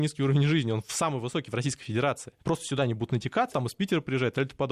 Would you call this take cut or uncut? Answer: cut